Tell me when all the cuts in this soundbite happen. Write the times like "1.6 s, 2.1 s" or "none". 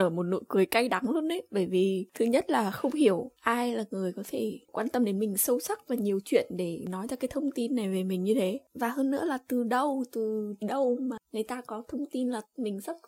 none